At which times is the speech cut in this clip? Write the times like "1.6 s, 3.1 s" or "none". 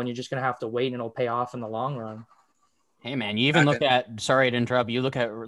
none

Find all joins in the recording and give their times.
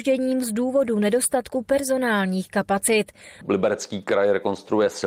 3.4 s

